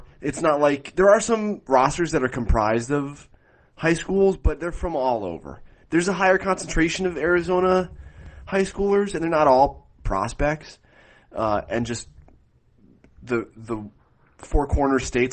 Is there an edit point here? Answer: no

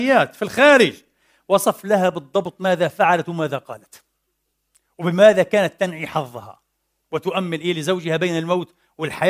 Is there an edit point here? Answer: no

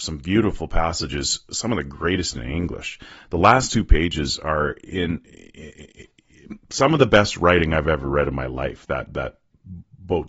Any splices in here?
no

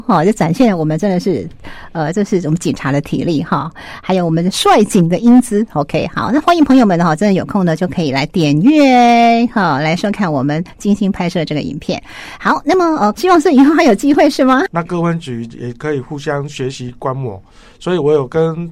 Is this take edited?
yes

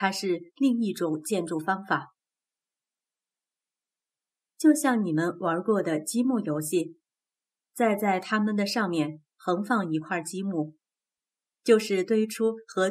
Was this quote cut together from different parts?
yes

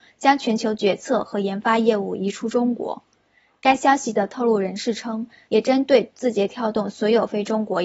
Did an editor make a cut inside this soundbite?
yes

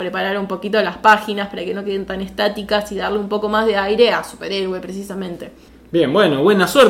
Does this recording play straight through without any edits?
yes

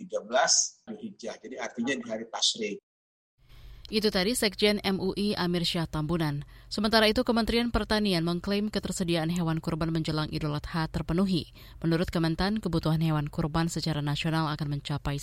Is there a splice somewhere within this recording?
no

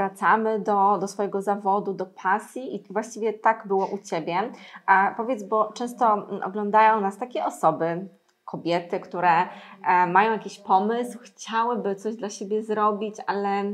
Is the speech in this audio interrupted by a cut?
no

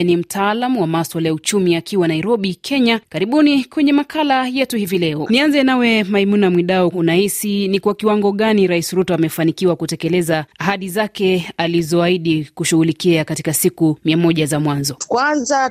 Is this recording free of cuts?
no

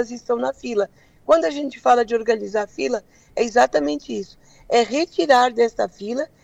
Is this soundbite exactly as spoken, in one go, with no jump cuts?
yes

